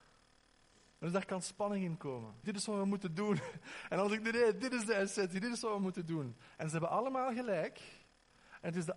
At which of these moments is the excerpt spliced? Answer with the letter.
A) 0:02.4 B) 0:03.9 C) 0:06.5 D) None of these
A